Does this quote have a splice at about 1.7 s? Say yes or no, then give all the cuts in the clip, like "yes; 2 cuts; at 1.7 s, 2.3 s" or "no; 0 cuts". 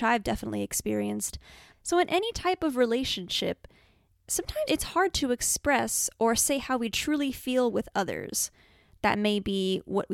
yes; 2 cuts; at 1.7 s, 4.7 s